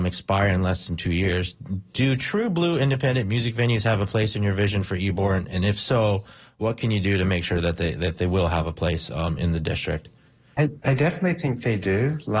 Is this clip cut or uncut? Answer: uncut